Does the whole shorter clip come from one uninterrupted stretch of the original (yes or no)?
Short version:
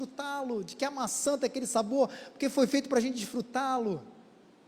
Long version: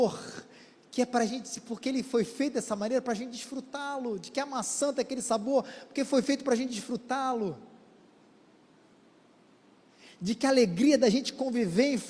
yes